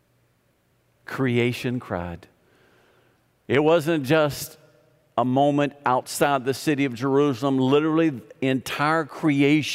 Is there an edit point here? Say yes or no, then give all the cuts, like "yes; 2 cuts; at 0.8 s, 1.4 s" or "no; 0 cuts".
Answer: no; 0 cuts